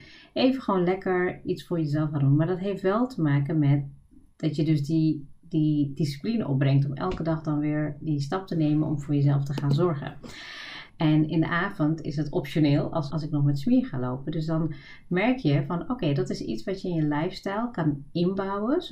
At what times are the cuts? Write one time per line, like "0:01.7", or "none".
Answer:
0:10.9
0:13.1